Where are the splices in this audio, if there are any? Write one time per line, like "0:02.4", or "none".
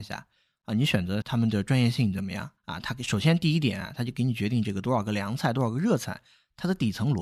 0:01.2
0:02.6